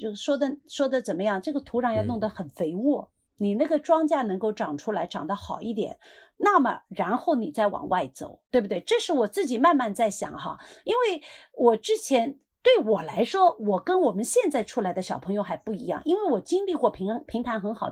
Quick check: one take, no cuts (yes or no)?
no